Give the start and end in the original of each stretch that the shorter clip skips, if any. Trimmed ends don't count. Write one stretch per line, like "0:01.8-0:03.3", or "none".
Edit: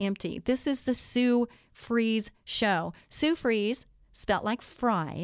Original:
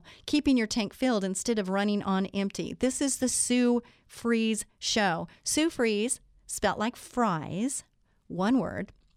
none